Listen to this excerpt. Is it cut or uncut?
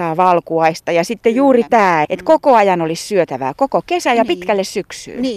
cut